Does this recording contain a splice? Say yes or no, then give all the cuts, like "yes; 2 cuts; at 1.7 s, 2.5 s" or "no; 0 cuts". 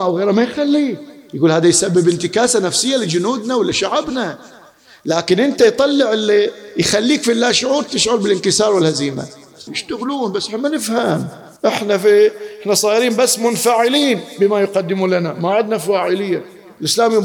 yes; 2 cuts; at 9.7 s, 11.6 s